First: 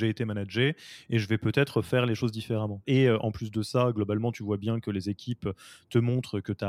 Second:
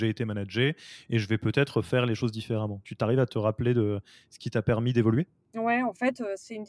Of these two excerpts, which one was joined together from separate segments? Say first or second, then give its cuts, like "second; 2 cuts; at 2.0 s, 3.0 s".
first; 1 cut; at 2.8 s